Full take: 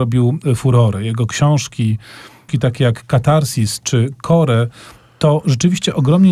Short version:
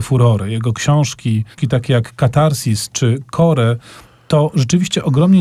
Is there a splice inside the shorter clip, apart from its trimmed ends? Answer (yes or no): yes